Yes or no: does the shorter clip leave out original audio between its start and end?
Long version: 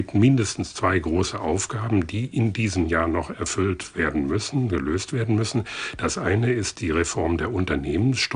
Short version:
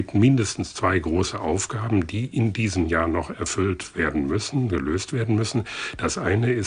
no